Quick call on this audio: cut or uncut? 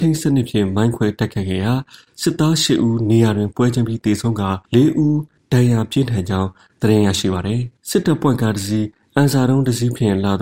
cut